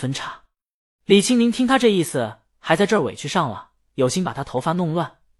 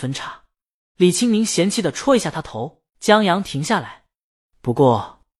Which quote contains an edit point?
second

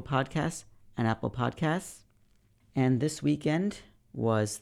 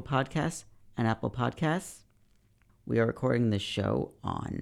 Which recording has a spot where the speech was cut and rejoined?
first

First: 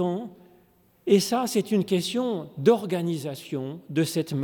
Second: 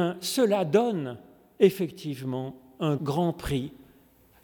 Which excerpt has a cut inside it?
second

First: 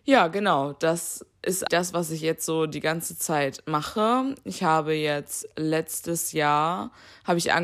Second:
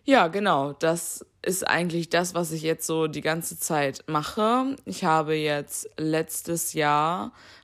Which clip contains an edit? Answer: first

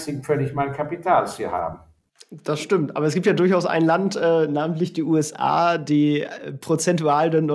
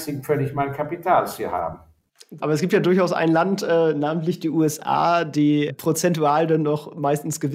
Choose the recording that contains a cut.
second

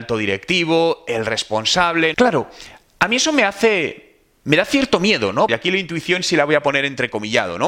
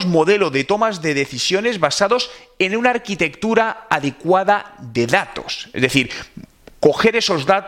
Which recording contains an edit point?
first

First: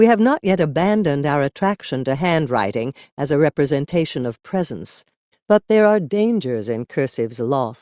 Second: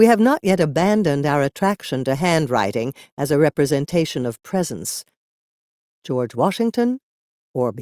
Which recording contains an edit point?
first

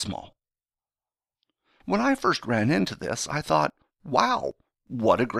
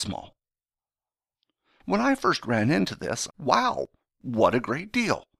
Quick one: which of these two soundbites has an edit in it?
second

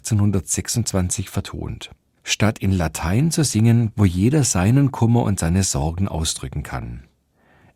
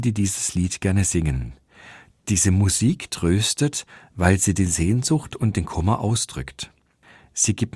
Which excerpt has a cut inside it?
first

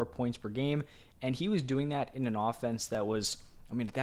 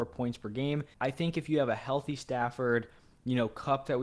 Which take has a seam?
second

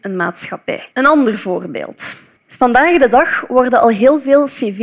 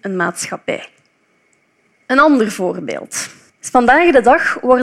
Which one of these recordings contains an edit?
first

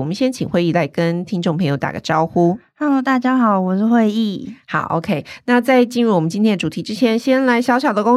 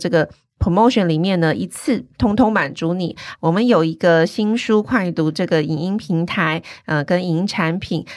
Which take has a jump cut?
second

